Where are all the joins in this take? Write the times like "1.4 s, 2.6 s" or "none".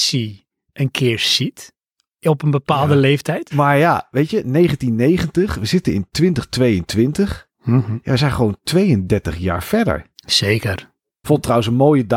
3.5 s, 11.2 s